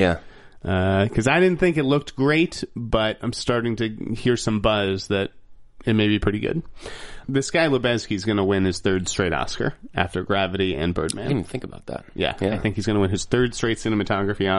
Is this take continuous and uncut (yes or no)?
no